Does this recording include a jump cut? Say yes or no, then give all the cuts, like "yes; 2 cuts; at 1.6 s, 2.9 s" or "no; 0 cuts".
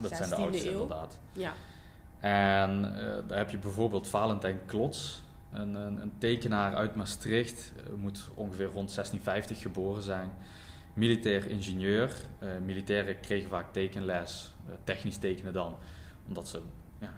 yes; 1 cut; at 5.5 s